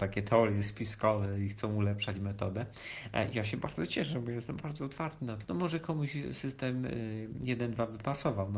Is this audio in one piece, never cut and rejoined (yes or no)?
no